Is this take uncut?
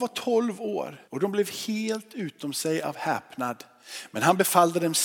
no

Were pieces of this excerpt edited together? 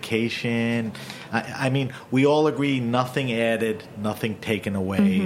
no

